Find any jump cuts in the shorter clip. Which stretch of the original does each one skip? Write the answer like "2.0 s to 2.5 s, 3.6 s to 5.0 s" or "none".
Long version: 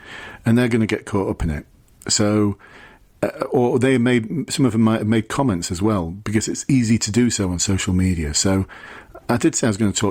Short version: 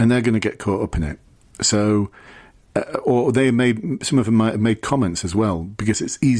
none